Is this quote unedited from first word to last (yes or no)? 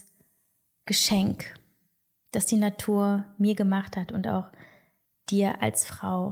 yes